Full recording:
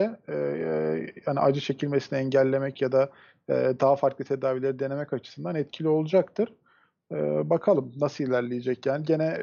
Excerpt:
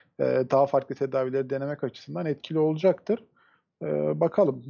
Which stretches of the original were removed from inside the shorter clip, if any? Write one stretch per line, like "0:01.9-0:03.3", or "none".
none